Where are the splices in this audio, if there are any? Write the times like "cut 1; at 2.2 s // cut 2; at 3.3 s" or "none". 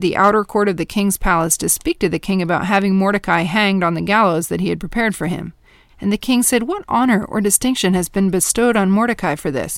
cut 1; at 5.9 s